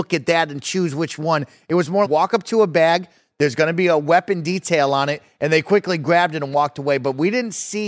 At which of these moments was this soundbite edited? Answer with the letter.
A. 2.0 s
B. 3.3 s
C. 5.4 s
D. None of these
A